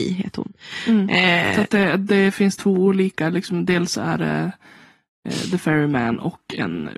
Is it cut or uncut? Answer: uncut